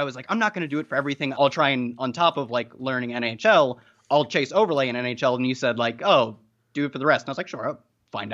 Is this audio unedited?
no; 1 cut; at 1.3 s

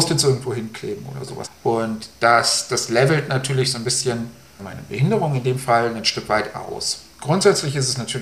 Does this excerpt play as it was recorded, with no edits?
no; 2 cuts; at 1.4 s, 4.6 s

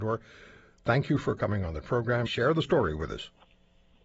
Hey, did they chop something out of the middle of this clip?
yes; 1 cut; at 2.3 s

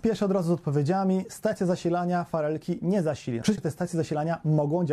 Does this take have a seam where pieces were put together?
yes; 1 cut; at 3.6 s

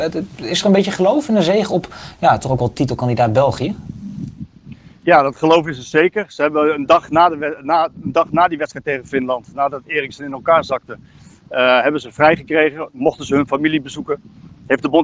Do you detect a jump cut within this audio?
no; 0 cuts

